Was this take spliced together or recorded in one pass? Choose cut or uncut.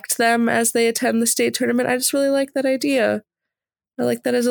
uncut